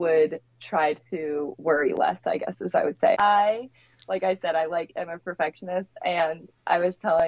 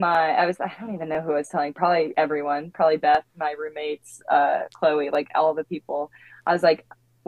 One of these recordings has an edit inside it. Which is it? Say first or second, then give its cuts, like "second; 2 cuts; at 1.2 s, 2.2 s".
first; 1 cut; at 3.1 s